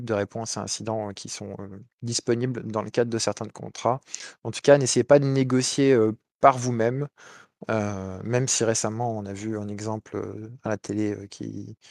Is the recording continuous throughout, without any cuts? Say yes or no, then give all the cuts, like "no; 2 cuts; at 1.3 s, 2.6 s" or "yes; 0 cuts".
yes; 0 cuts